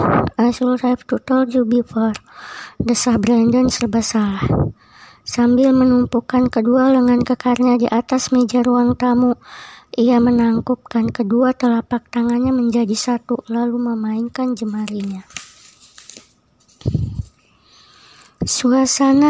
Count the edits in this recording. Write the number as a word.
zero